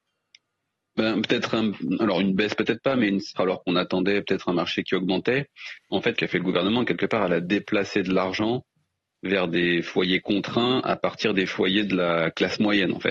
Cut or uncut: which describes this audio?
cut